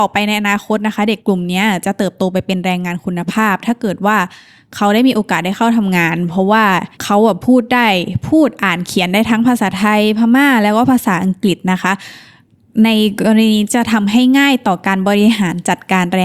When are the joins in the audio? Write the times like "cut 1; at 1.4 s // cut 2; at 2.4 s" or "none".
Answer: cut 1; at 1.2 s // cut 2; at 6.9 s